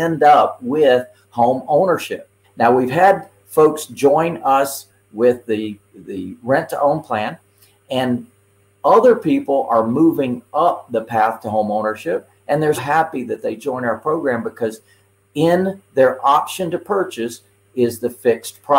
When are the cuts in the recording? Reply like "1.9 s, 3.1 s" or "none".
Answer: 2.4 s, 12.8 s